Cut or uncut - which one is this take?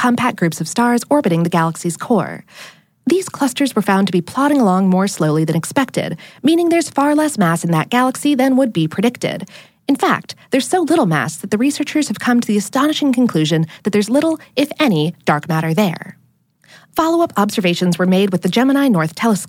cut